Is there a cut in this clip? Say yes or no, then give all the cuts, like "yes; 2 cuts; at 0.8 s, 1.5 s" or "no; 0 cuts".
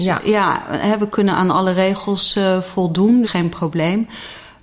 yes; 1 cut; at 3.2 s